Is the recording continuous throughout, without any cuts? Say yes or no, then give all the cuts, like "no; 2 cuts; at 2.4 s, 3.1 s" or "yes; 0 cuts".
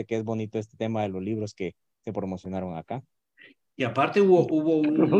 yes; 0 cuts